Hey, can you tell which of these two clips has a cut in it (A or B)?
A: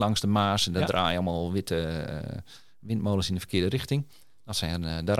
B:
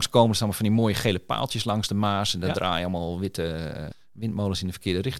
B